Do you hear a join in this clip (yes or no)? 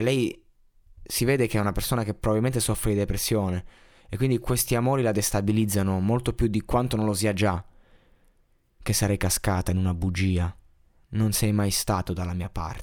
no